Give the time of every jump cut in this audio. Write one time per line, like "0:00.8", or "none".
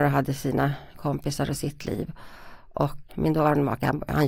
0:03.1